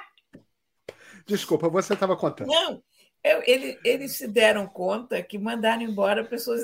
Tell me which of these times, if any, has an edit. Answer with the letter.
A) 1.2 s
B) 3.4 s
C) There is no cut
B